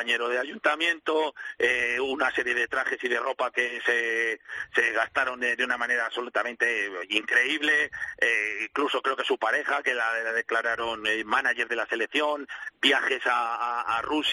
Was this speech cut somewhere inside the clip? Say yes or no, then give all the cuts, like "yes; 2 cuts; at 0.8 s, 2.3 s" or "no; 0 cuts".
no; 0 cuts